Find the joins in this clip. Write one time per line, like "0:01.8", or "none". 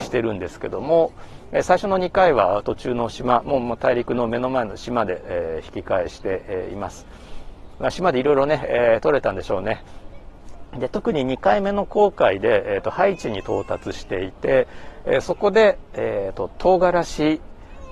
none